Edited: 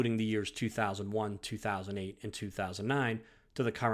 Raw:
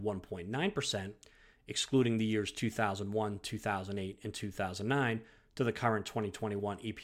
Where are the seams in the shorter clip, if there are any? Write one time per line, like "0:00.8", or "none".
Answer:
none